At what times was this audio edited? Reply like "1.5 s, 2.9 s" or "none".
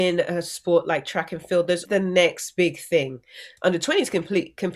1.9 s, 3.6 s